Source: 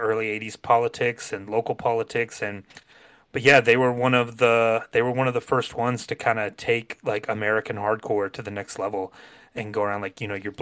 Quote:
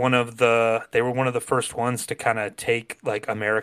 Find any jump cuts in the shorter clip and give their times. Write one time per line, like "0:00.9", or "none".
none